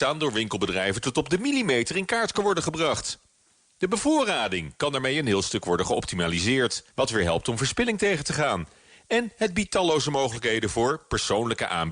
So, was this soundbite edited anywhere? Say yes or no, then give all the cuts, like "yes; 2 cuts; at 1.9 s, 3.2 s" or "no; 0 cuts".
yes; 1 cut; at 6.9 s